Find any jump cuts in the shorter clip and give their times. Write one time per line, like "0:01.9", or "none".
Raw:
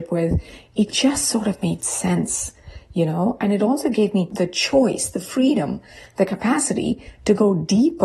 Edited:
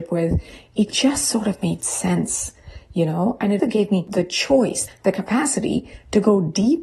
0:03.6
0:04.9